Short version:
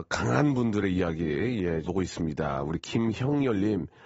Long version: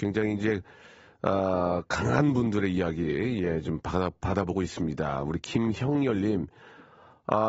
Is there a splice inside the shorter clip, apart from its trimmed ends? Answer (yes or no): yes